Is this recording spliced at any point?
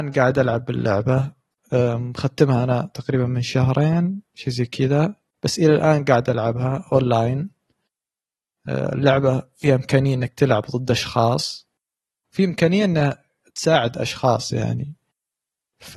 no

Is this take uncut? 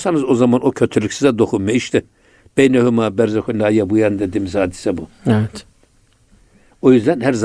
yes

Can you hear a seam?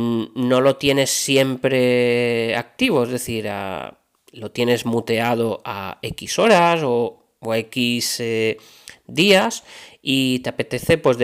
no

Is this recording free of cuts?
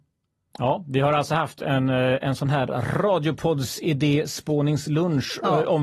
yes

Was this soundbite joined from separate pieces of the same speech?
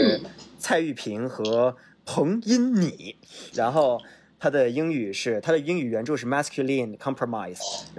yes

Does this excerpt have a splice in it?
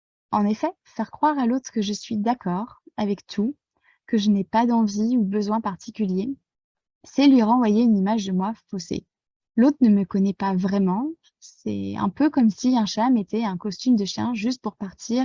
yes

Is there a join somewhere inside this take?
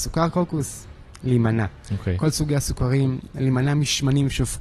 no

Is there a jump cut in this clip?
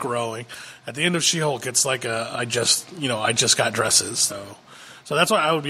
yes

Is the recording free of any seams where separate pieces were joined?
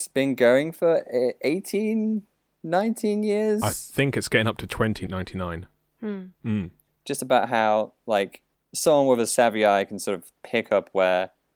no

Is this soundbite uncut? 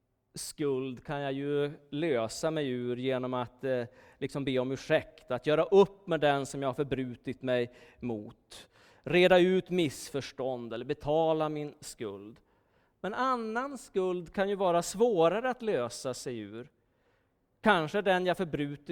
yes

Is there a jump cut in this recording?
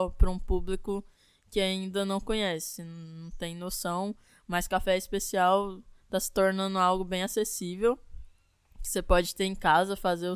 no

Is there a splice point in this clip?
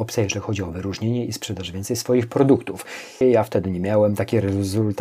yes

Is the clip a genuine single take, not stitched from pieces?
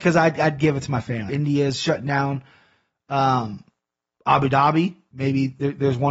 no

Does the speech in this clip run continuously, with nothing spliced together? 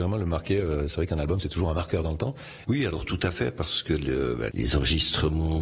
no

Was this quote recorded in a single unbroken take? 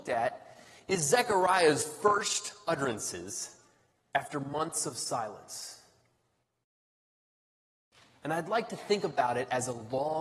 yes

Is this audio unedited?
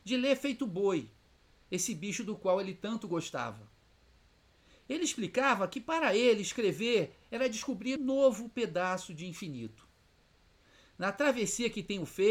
no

